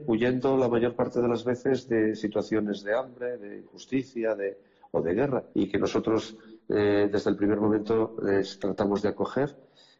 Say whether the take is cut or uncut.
cut